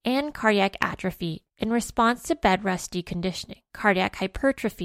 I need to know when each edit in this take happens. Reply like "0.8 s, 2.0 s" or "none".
3.7 s